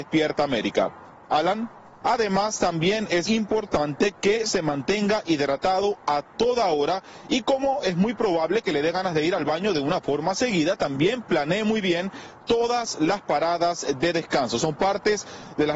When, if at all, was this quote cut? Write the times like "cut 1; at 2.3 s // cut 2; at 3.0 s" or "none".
cut 1; at 2.0 s // cut 2; at 3.3 s